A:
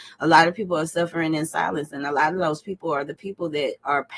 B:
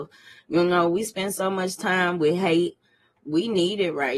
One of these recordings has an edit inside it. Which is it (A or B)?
B